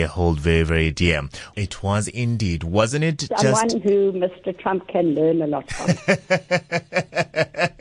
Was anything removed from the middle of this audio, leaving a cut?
yes; 1 cut; at 1.5 s

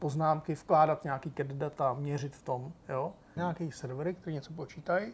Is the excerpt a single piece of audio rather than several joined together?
no; 1 cut; at 3.4 s

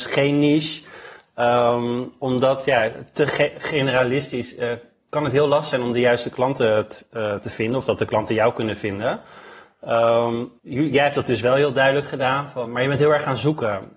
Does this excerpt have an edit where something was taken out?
yes; 2 cuts; at 10.6 s, 12.7 s

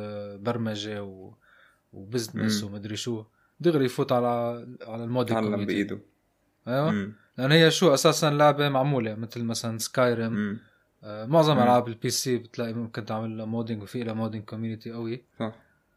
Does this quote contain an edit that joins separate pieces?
no; 0 cuts

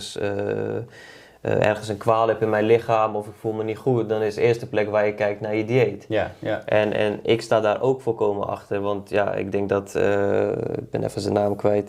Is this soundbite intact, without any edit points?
yes; 0 cuts

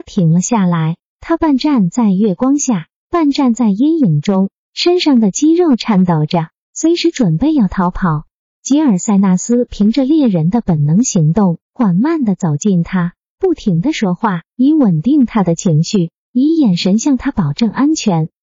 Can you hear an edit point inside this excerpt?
yes; 1 cut; at 11.6 s

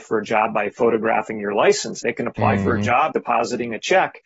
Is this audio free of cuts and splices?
no; 2 cuts; at 2.0 s, 3.1 s

